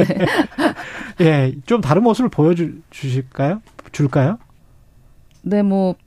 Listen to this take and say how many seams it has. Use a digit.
0